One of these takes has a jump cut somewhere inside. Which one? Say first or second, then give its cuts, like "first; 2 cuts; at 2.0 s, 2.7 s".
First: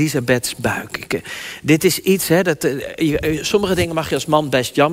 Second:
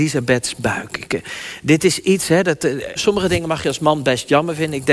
second; 1 cut; at 3.0 s